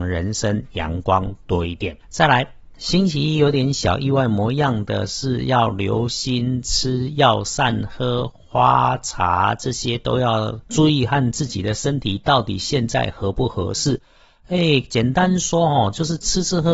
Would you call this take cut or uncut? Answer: cut